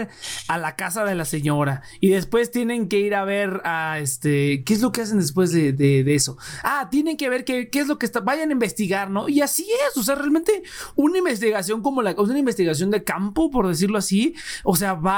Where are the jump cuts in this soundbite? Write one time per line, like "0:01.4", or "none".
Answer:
none